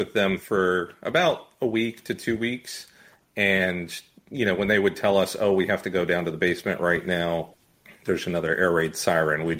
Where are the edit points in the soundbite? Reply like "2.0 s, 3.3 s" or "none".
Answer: none